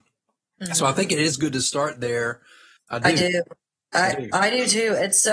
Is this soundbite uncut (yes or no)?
no